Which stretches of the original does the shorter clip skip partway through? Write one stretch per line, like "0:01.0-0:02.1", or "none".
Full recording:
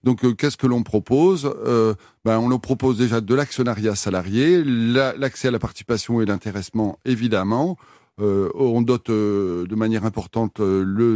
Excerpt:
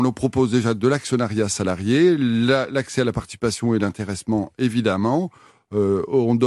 none